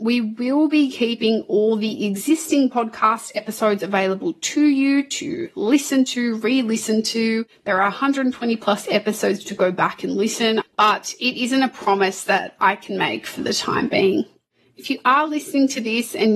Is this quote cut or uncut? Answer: cut